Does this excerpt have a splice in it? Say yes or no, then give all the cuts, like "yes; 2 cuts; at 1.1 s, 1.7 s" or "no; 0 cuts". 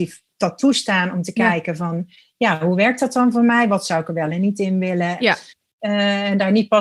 yes; 1 cut; at 5.2 s